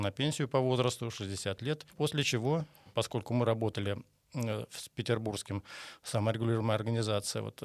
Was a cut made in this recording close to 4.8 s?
no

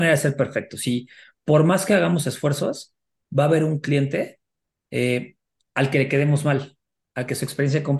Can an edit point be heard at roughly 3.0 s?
no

